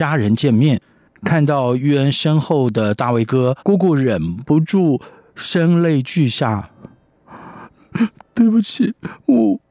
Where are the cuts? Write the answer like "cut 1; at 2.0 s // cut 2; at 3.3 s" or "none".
cut 1; at 1.1 s // cut 2; at 3.6 s